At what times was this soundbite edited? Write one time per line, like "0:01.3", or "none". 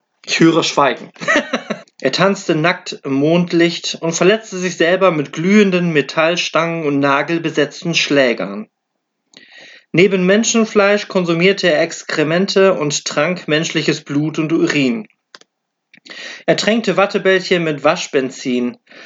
0:01.8